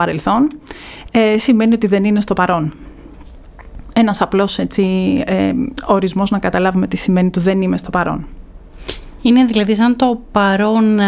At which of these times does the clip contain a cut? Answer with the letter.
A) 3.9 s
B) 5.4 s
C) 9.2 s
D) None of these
D